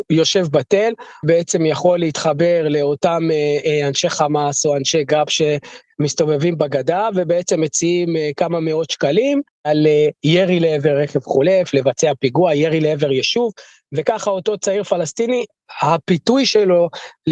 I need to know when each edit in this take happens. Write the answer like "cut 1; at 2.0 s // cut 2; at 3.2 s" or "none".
cut 1; at 1.2 s